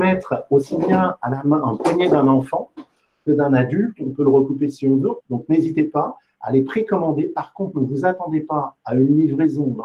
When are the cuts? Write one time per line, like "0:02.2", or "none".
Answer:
0:05.2